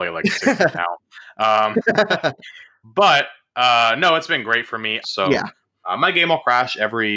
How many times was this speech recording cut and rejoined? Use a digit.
1